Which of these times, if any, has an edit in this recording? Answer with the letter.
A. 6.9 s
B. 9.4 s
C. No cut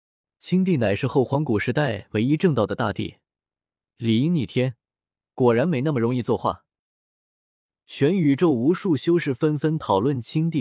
C